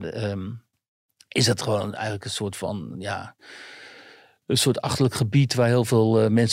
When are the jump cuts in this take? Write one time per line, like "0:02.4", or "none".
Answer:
none